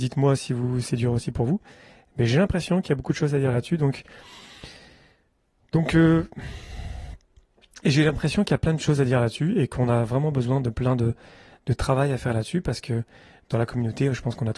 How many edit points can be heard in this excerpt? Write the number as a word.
zero